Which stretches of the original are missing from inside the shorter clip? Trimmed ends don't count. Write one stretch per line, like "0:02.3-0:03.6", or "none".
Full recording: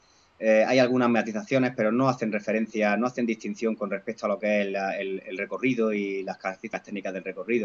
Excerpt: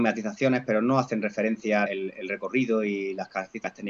0:03.0-0:04.9